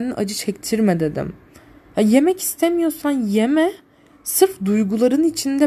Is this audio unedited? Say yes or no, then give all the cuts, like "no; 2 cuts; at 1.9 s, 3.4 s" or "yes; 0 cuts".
yes; 0 cuts